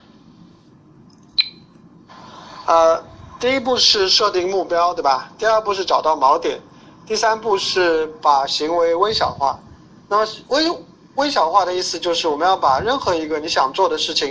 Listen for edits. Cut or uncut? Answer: uncut